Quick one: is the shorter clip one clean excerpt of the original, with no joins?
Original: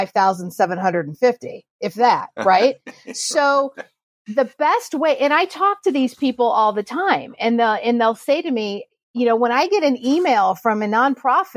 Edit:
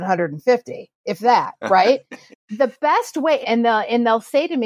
no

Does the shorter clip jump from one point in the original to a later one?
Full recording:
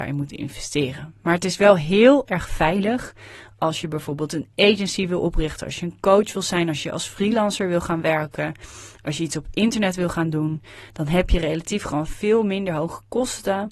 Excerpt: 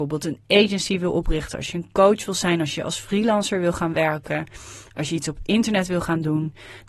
no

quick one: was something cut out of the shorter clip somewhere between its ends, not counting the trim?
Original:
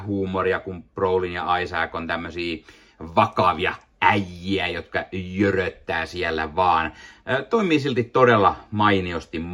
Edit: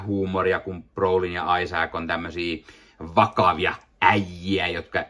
no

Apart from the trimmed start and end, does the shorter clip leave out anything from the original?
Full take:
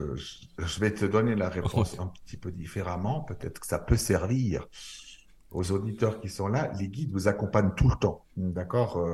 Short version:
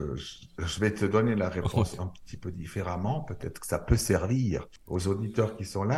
yes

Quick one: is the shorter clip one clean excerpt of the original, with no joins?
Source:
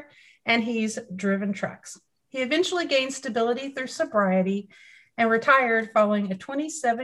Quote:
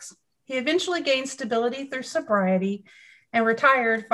yes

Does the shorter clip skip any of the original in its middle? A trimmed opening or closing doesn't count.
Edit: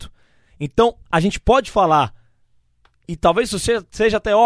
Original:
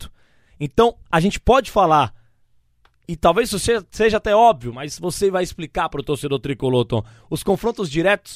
no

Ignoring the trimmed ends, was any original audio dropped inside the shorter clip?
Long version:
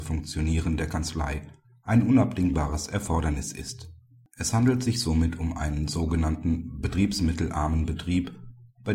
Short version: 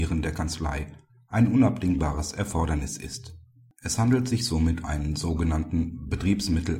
yes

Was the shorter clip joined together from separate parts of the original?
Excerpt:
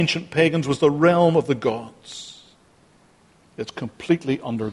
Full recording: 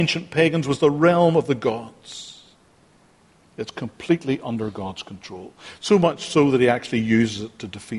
no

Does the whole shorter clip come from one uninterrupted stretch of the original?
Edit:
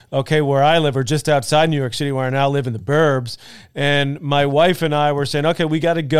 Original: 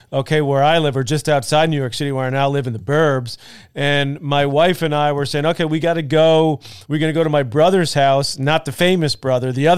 yes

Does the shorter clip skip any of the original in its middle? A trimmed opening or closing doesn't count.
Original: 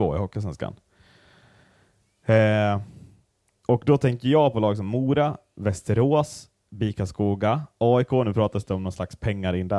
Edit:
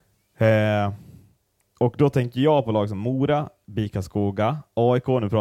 yes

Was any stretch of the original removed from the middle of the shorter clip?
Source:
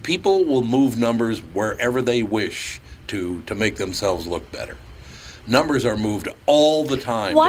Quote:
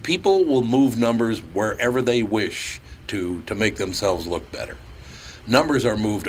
no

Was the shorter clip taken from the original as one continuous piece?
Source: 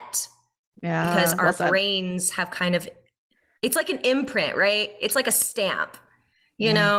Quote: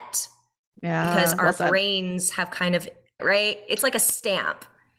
no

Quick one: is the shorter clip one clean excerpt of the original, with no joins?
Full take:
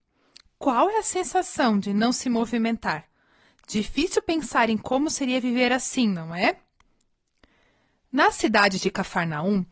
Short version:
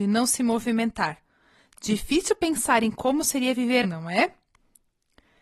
no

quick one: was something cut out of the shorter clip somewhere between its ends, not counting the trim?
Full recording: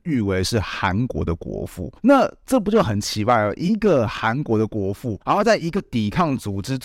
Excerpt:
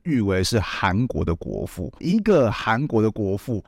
yes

